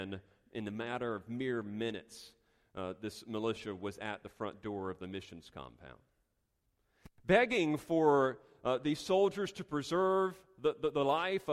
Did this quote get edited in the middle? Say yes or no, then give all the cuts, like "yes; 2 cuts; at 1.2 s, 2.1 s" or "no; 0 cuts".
no; 0 cuts